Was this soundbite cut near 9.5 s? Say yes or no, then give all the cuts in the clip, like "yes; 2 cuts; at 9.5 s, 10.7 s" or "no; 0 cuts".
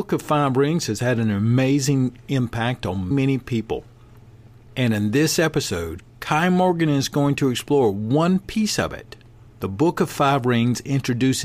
yes; 2 cuts; at 3.1 s, 9.5 s